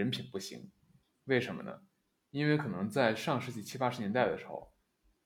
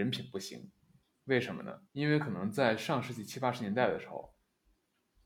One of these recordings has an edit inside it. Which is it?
second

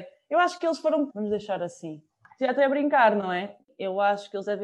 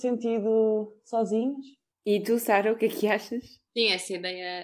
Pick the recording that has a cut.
first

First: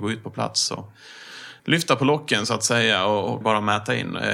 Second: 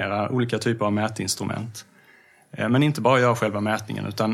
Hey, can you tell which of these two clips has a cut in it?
first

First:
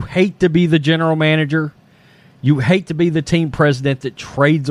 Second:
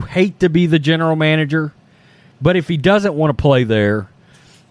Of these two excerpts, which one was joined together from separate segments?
second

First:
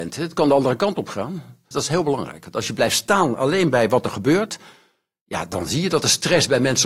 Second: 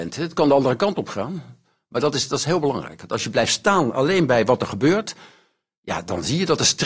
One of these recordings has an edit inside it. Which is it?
first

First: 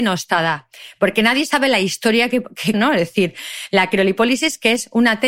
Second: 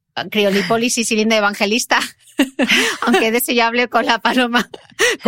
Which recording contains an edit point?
first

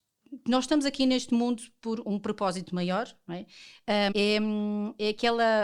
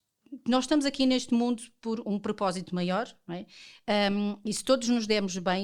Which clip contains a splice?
first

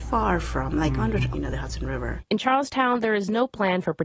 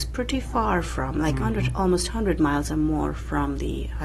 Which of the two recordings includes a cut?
first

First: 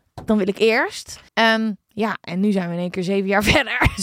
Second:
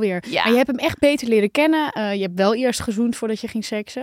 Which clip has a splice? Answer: first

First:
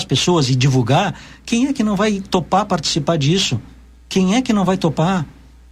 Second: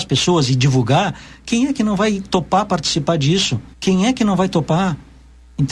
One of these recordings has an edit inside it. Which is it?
second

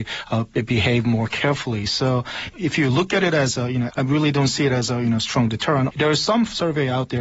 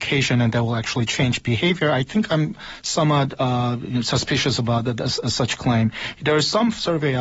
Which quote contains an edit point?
first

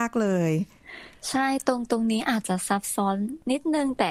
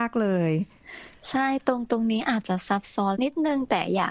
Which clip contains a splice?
second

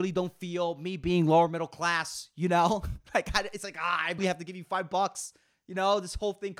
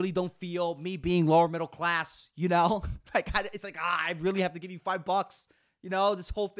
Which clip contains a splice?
first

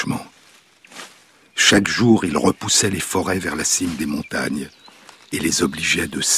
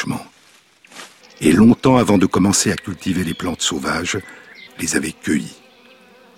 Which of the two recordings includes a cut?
second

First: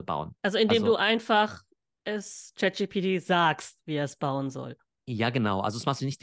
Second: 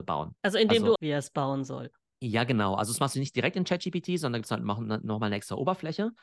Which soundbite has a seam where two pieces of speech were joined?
second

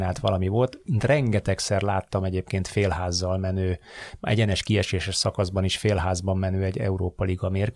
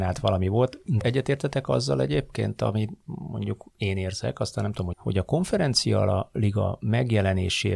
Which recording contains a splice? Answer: second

